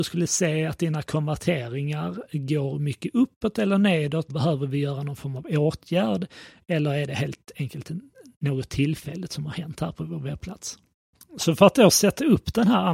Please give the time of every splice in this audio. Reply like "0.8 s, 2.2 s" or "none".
4.3 s